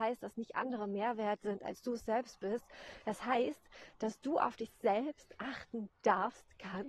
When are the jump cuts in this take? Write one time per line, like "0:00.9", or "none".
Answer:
none